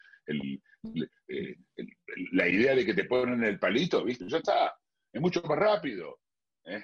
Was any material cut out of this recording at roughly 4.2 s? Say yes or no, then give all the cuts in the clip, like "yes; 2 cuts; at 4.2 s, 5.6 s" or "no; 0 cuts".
yes; 1 cut; at 4.2 s